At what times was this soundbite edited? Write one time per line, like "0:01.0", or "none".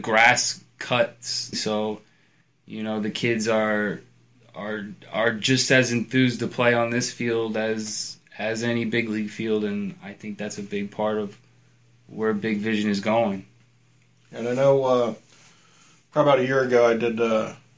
0:01.5